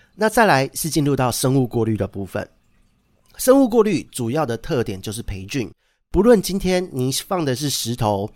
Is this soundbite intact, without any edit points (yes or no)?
yes